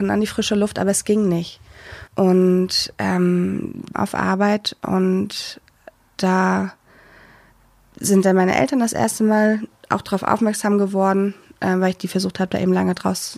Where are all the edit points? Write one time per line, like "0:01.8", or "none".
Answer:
0:02.1
0:03.9